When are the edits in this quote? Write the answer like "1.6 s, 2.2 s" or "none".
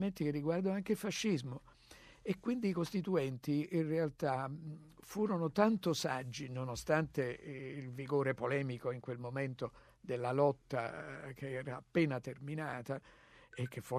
none

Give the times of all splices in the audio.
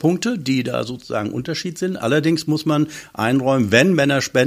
none

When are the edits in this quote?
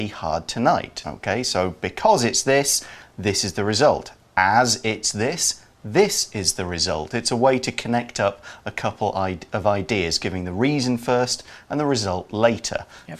1.0 s

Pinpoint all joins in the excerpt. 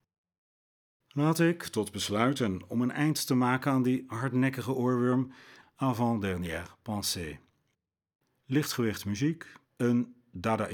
5.6 s, 9.6 s

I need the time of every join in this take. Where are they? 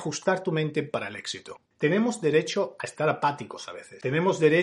1.7 s

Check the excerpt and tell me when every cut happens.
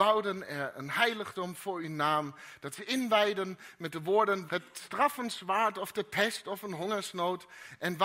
4.5 s

